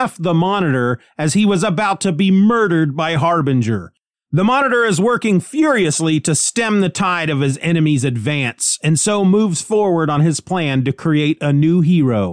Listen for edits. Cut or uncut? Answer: cut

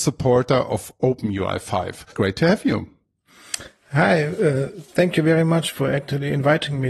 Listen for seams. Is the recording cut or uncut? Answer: cut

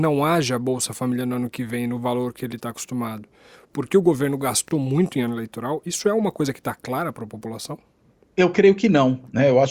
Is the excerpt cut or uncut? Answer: uncut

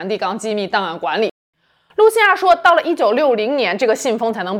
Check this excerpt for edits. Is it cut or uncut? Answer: uncut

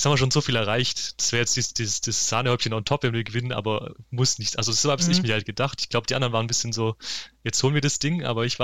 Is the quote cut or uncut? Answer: uncut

